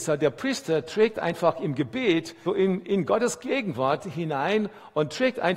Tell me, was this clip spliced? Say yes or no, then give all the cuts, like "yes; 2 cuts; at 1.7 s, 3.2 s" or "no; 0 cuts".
yes; 1 cut; at 2.4 s